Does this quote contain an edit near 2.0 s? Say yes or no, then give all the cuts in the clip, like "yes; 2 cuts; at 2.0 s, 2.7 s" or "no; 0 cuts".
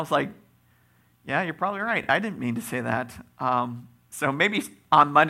no; 0 cuts